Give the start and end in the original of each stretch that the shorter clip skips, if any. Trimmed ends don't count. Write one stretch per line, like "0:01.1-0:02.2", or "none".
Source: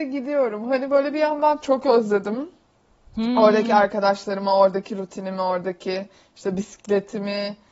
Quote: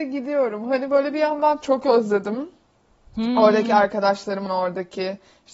0:04.5-0:05.4

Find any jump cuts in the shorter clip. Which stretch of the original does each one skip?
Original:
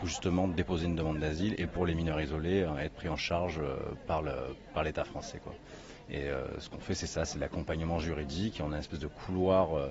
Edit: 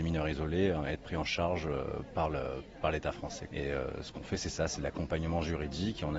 0:05.4-0:06.1

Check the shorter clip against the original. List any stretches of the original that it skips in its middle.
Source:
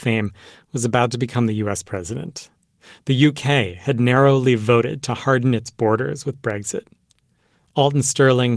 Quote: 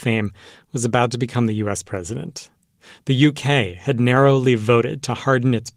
none

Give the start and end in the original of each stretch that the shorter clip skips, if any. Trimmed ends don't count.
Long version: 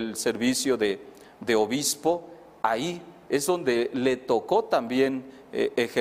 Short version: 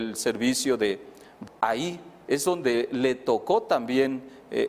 0:01.5-0:02.5

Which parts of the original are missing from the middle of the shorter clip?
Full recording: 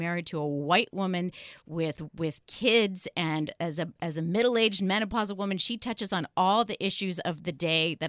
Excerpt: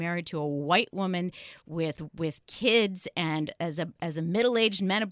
none

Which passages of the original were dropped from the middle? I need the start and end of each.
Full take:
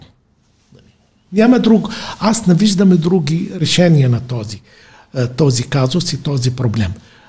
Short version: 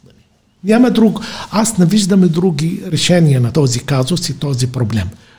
0:04.2-0:05.4

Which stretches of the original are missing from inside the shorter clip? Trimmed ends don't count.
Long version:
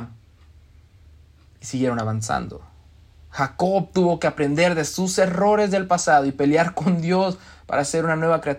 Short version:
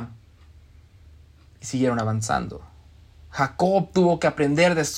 none

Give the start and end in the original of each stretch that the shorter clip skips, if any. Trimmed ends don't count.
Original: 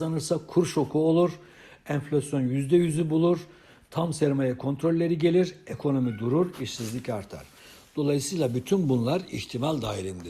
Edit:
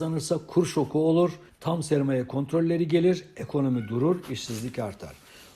0:01.5-0:03.8

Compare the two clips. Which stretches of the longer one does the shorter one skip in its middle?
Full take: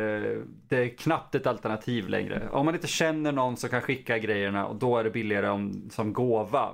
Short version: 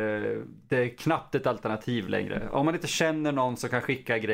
none

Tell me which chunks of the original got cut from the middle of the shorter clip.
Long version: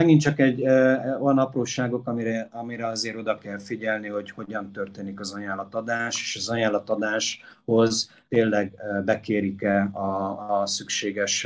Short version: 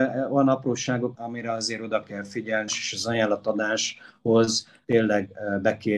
0:02.0-0:02.5
0:04.0-0:06.1

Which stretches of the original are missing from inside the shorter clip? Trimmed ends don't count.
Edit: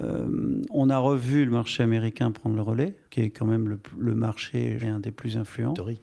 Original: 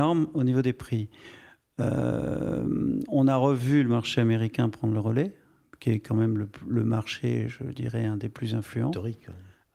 0:05.4-0:05.7
0:07.5-0:08.0

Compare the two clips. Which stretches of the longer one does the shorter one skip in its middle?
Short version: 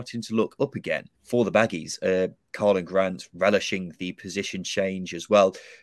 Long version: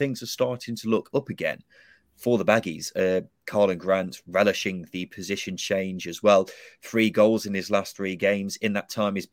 0:01.7-0:02.1

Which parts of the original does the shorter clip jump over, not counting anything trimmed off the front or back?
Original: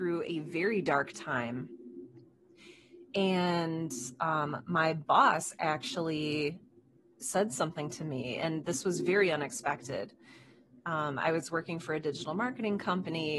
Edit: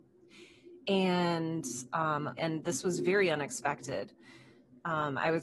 0:04.6-0:08.4

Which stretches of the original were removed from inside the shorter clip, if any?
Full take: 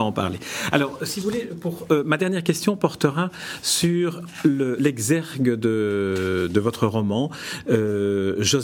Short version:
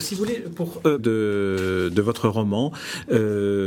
0:02.0-0:05.6

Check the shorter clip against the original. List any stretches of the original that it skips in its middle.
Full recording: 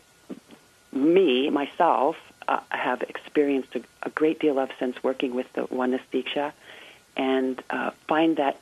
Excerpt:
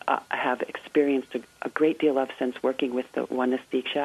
none

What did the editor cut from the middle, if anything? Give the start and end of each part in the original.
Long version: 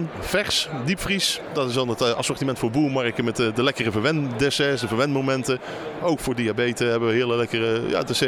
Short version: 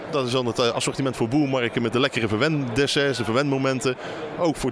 0:03.3-0:03.5

